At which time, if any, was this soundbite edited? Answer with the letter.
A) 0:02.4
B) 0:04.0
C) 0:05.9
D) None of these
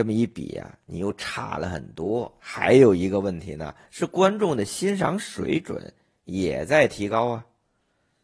A